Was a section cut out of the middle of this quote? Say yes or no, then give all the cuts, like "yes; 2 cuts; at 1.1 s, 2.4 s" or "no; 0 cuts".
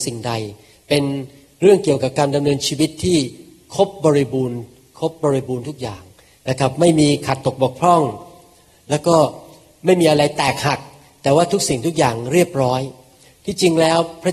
no; 0 cuts